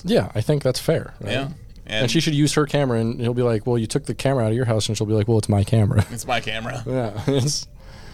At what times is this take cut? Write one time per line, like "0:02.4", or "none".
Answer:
none